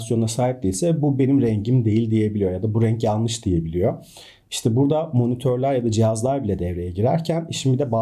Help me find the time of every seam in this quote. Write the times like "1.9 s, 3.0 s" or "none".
none